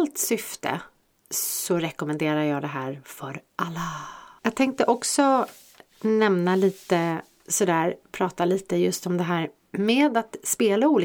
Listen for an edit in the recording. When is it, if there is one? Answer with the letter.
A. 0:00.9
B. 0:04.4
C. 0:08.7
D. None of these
B